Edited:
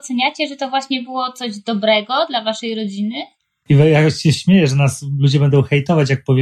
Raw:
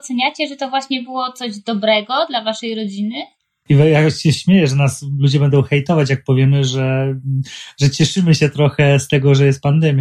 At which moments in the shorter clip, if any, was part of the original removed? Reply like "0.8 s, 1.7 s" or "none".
none